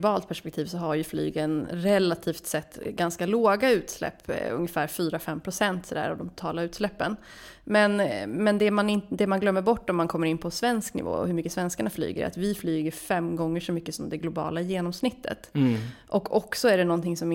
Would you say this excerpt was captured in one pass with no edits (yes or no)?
yes